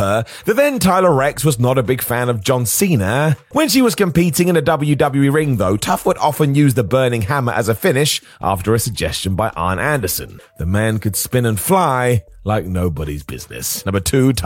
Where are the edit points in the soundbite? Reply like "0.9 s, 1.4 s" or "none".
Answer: 3.5 s, 10.4 s

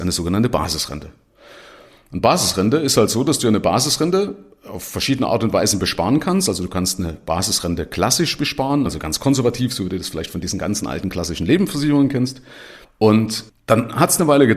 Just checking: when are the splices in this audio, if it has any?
8.9 s, 12.8 s

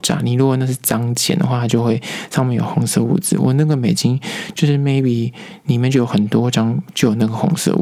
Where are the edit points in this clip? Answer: none

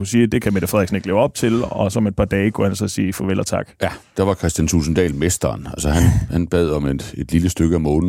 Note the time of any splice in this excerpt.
none

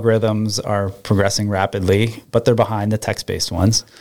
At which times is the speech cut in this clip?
none

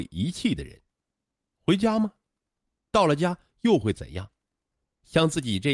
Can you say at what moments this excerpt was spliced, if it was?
1.4 s

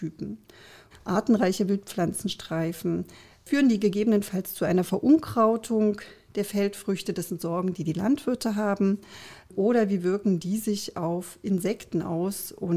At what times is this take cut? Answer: 0.9 s

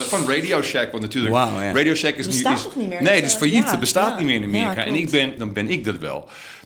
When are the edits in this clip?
5.4 s

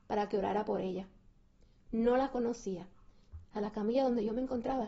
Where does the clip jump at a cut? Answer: 3.4 s

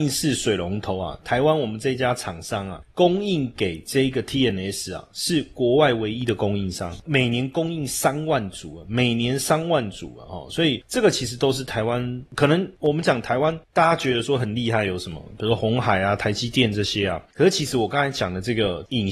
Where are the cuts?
15.6 s

